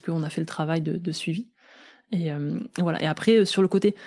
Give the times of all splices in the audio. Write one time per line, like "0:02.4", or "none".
none